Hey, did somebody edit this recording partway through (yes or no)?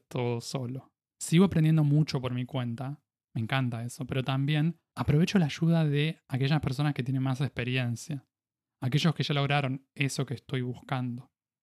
yes